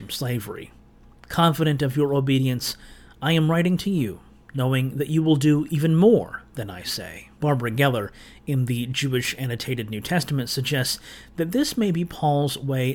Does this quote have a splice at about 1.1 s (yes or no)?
yes